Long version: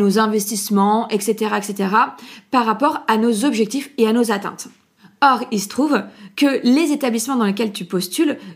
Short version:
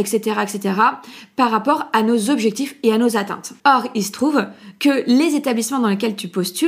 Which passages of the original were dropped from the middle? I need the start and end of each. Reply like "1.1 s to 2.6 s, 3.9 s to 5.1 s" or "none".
4.7 s to 5.2 s